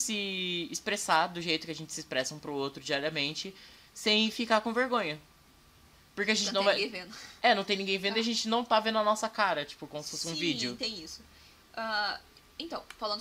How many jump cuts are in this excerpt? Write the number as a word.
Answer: zero